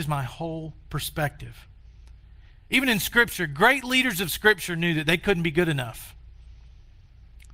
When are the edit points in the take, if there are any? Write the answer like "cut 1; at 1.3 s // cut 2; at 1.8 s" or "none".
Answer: none